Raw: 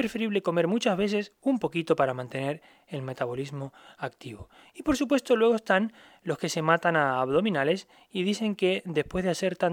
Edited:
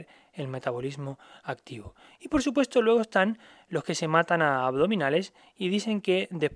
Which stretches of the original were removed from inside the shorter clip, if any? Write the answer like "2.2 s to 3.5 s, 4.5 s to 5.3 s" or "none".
none